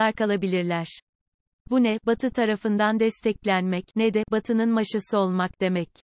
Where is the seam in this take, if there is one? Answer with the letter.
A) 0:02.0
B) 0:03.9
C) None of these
C